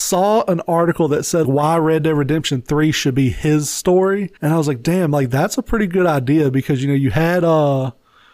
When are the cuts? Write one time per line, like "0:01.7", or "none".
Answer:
0:01.4
0:04.4